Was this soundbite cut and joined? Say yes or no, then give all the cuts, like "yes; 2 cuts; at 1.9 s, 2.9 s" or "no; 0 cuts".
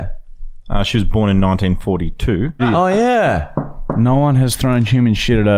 yes; 1 cut; at 2.6 s